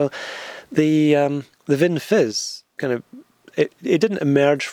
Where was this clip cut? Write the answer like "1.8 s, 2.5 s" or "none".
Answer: 1.5 s, 3.5 s